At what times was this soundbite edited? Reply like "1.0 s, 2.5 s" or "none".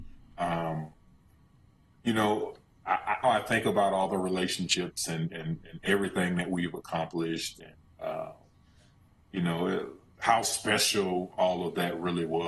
3.2 s